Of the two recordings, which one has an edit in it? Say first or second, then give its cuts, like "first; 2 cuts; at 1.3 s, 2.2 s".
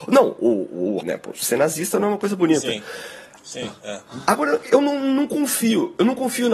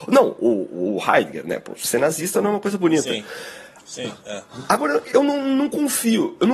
first; 1 cut; at 1.0 s